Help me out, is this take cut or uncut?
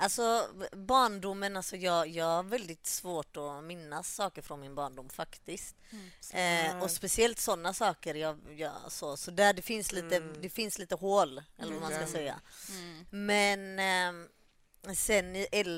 uncut